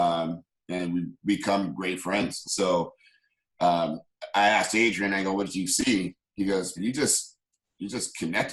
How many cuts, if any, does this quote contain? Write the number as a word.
two